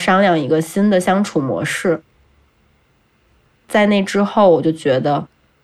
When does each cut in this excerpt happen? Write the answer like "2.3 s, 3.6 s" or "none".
none